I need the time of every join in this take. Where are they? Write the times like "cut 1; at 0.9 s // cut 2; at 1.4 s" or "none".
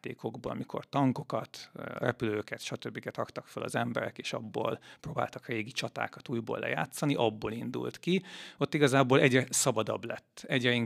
none